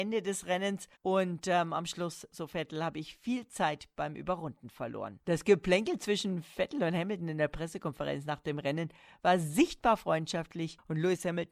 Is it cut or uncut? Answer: cut